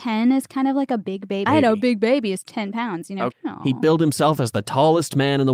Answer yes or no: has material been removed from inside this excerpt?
yes